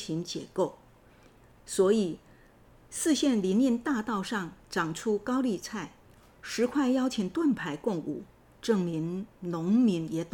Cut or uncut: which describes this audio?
uncut